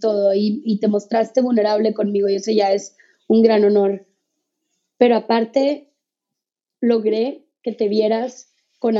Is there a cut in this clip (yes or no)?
no